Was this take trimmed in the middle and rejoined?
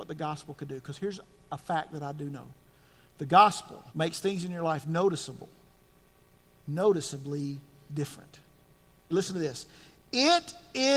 yes; 2 cuts; at 3.9 s, 9.1 s

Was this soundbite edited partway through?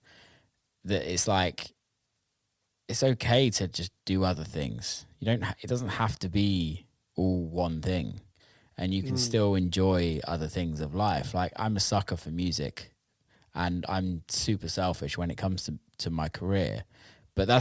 no; 0 cuts

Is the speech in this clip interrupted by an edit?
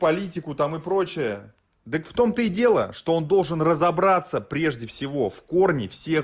no; 0 cuts

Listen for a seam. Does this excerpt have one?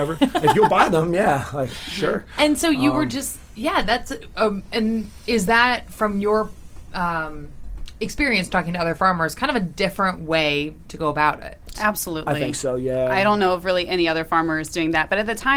no; 0 cuts

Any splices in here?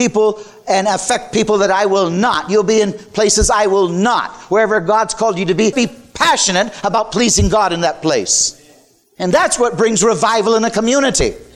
yes; 1 cut; at 5.7 s

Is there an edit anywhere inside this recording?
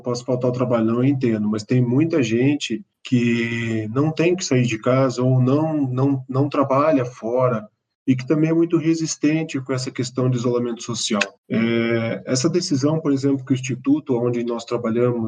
no; 0 cuts

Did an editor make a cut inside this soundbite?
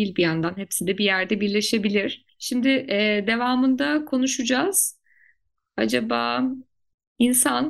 no; 0 cuts

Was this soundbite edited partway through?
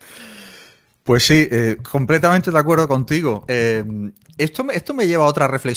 no; 0 cuts

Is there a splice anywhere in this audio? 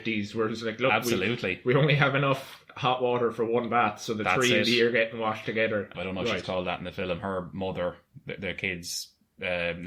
yes; 1 cut; at 5.9 s

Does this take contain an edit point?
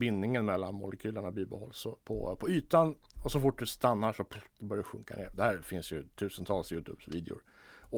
yes; 1 cut; at 2.0 s

